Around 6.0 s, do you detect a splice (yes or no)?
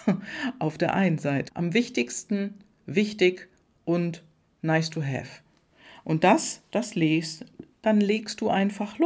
no